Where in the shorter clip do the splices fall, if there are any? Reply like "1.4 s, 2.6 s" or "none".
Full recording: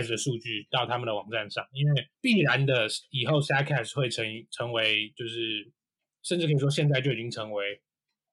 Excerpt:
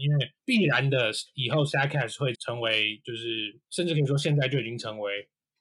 2.3 s, 3.6 s

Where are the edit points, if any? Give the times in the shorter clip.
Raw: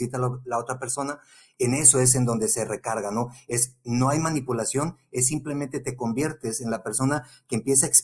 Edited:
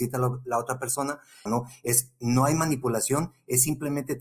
1.5 s

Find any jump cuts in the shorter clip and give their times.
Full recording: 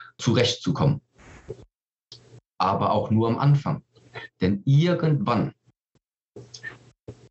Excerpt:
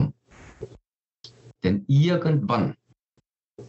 1.6 s

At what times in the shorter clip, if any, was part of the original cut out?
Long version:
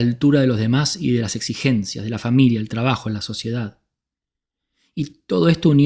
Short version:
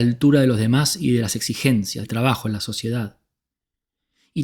2.0 s

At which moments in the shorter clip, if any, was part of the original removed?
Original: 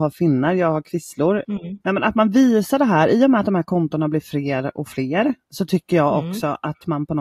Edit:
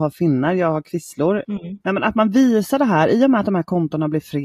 none

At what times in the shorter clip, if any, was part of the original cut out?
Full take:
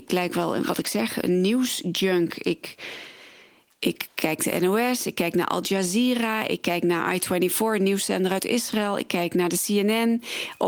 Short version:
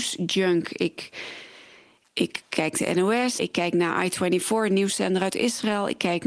3.4 s

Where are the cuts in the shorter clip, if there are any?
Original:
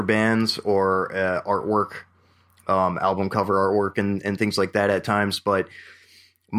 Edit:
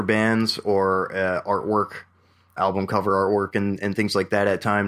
2.6 s

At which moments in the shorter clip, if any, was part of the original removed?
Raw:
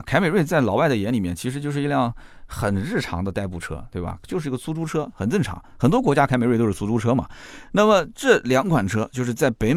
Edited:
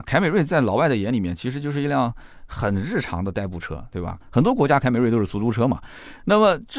4.2 s

